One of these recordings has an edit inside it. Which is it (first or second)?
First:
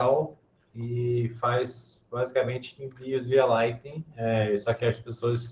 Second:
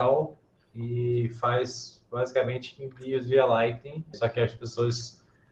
second